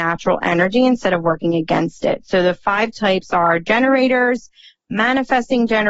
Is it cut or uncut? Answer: uncut